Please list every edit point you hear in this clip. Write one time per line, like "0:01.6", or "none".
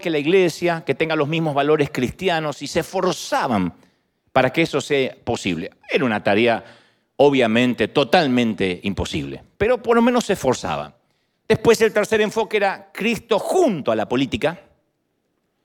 none

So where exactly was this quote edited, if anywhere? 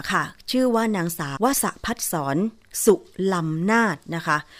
0:01.4

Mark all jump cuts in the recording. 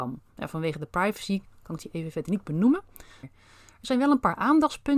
0:03.2

